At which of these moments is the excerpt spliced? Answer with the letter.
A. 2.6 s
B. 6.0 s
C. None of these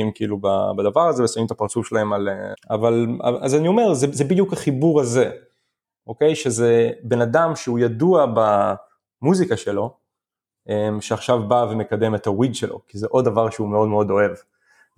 A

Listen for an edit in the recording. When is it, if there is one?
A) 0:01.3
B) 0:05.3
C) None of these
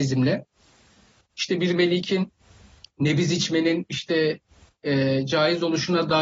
A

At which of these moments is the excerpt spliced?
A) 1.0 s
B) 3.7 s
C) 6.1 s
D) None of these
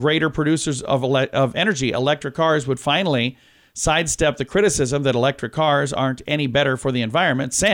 D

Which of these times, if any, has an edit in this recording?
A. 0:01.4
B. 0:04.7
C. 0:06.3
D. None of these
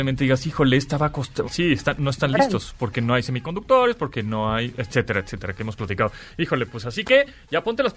A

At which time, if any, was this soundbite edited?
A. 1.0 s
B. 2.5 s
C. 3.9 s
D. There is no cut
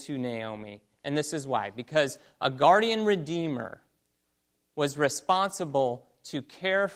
A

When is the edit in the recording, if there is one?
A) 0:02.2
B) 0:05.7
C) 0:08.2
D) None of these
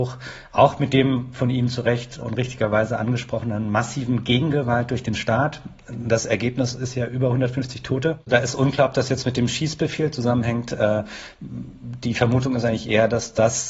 A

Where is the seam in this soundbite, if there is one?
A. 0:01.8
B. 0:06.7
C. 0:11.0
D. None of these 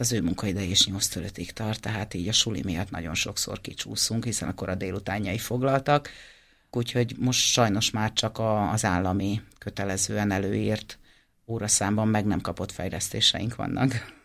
B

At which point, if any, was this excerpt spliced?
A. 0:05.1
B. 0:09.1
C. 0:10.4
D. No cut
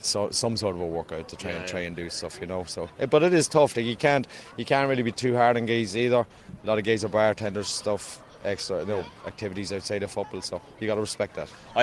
A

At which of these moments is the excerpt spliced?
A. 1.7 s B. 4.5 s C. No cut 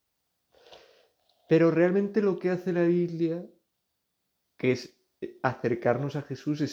C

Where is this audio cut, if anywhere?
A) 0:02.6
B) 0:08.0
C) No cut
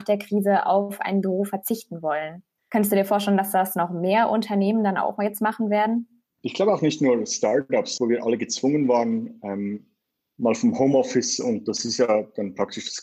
B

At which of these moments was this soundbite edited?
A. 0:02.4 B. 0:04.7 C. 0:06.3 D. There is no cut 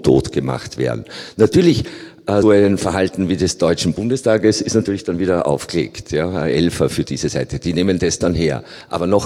A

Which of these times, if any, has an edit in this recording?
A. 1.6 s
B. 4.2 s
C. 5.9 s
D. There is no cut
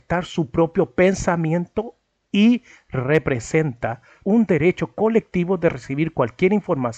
B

